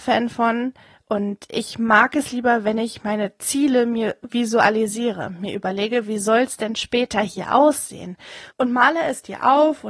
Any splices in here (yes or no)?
yes